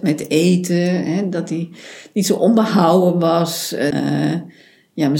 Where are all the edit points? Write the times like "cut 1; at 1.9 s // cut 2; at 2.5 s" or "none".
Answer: cut 1; at 3.9 s